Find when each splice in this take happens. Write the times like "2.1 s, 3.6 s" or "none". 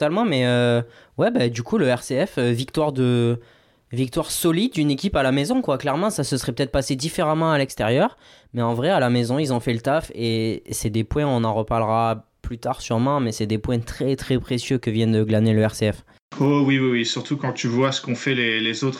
none

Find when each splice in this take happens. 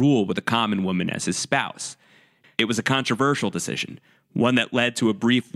2.4 s

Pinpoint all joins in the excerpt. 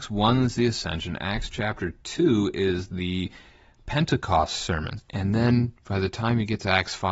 5.0 s

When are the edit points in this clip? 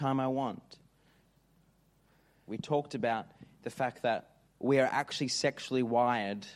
2.5 s

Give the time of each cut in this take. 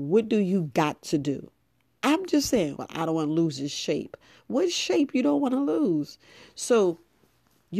2.8 s

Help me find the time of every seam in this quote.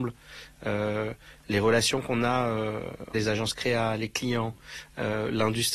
3.1 s

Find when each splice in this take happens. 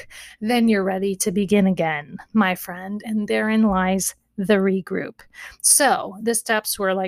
none

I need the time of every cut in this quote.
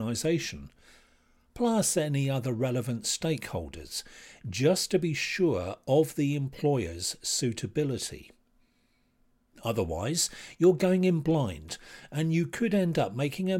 none

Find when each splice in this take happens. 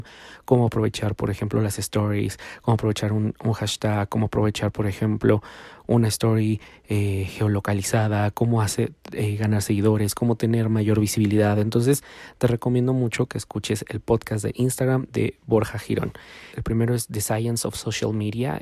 16.5 s

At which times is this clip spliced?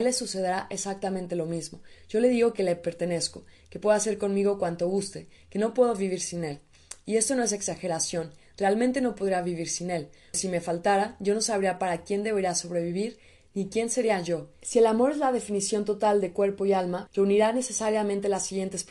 10.3 s, 14.6 s, 17.1 s

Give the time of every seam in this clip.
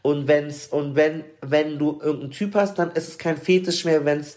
none

